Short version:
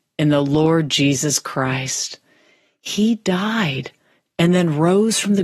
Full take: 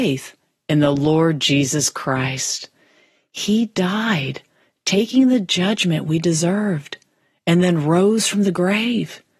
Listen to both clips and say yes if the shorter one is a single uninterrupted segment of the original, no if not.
no